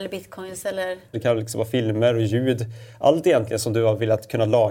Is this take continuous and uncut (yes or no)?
no